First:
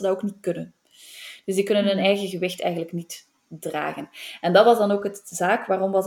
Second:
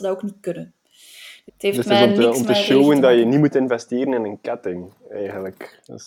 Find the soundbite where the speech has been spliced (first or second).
second